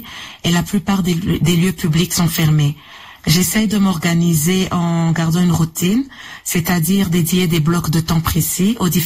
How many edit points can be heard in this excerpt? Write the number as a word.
one